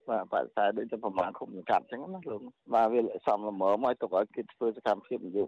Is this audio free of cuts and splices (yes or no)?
yes